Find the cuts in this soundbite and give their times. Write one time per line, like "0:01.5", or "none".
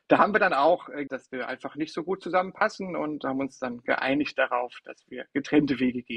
0:01.1

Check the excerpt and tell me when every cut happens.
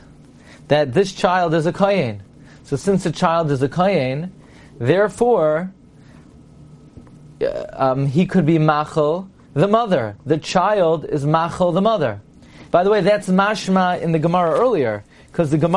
0:12.7

